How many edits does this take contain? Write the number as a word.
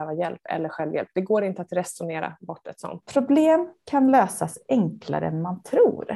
one